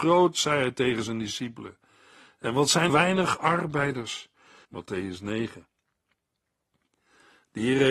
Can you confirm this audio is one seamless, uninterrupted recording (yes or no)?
no